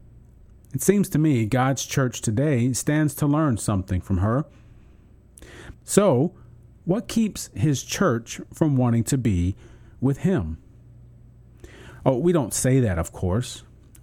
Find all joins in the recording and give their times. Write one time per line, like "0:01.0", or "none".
0:05.7